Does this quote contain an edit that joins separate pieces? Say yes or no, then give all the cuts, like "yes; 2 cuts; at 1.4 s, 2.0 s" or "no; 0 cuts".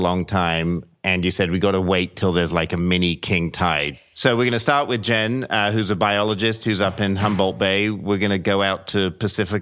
no; 0 cuts